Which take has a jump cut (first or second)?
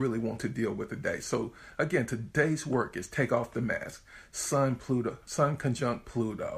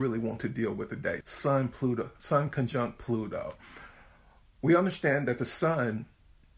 second